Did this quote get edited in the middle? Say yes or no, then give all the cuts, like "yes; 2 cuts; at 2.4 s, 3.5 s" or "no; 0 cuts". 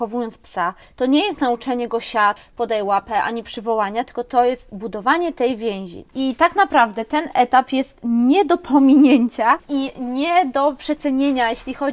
yes; 1 cut; at 6.1 s